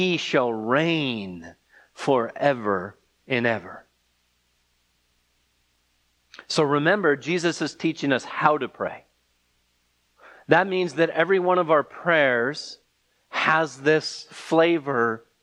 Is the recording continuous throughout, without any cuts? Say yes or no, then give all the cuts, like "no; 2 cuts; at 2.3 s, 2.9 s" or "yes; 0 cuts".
yes; 0 cuts